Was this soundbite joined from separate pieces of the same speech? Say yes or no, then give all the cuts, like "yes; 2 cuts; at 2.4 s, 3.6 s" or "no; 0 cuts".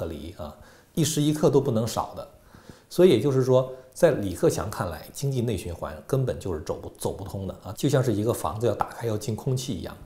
yes; 2 cuts; at 0.9 s, 7.8 s